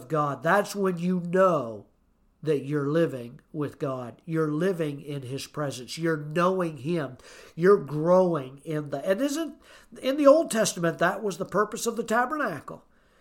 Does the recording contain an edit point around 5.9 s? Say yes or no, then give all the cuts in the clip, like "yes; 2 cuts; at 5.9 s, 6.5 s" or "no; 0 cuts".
no; 0 cuts